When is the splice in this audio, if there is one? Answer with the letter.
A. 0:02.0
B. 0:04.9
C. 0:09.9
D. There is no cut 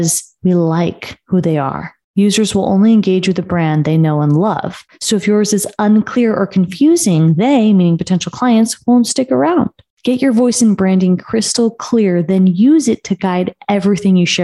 D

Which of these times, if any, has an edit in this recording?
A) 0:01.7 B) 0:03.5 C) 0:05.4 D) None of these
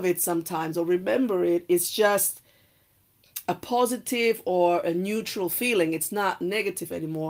B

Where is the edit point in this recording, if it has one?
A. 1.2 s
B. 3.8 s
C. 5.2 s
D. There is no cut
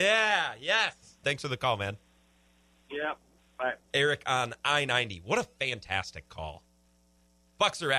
A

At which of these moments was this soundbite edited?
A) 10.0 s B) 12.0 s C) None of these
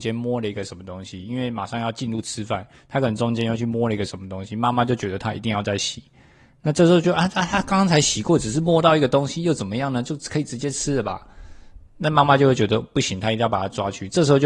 C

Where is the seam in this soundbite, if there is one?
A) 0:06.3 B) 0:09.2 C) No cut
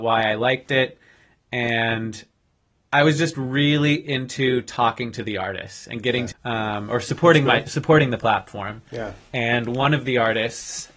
A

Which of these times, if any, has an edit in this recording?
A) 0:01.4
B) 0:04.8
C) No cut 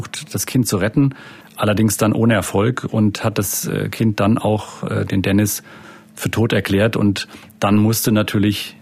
A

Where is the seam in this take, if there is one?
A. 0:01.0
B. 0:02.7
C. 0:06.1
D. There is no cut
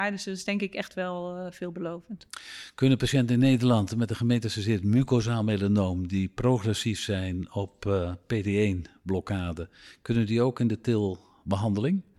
D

